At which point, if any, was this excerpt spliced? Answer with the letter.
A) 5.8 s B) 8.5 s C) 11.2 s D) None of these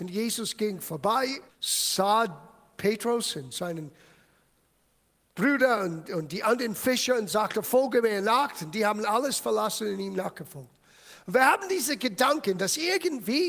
D